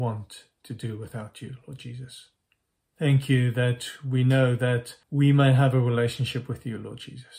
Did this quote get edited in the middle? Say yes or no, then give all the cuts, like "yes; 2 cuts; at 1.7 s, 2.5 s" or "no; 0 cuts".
yes; 2 cuts; at 2.9 s, 5.0 s